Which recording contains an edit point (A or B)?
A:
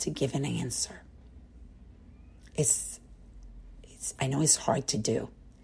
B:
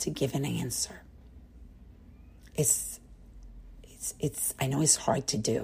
A